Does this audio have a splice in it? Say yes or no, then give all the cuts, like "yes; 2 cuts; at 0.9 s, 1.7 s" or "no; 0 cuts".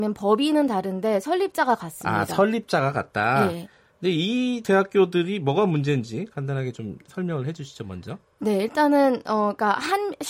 no; 0 cuts